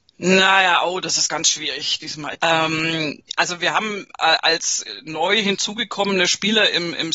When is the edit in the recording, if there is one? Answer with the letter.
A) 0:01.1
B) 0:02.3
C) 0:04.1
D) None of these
B